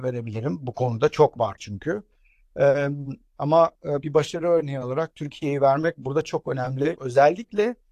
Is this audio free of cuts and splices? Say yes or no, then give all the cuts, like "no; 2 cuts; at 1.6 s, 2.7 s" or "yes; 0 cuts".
no; 1 cut; at 7.0 s